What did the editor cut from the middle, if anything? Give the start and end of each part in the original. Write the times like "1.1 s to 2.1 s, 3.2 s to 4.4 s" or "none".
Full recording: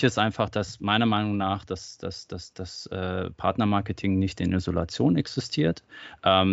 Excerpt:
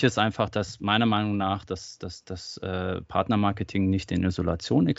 2.0 s to 2.3 s